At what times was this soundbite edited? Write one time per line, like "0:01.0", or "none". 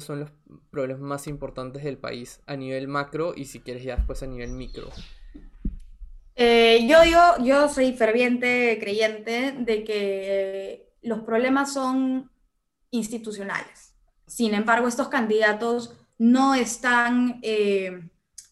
0:14.3